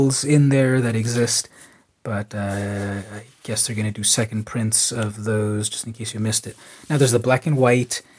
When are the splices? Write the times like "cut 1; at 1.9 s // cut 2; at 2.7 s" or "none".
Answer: none